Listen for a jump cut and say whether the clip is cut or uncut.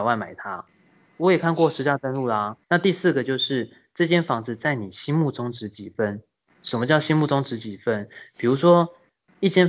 cut